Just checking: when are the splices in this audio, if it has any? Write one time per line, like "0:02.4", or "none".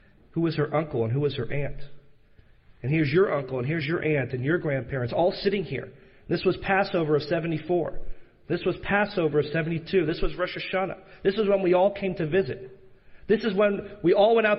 none